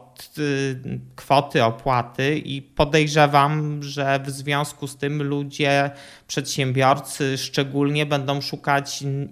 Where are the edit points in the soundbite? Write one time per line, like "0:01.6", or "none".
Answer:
none